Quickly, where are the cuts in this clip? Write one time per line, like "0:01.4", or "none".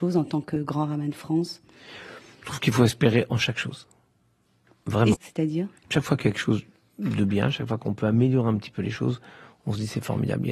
0:05.1